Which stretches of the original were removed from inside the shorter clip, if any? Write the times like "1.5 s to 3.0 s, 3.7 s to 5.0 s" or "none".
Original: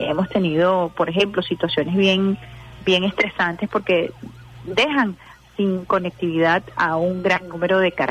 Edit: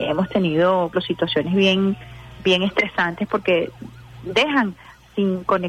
0.9 s to 1.3 s